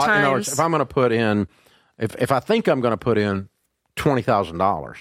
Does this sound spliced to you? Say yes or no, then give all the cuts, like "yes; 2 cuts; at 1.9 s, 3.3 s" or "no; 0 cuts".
no; 0 cuts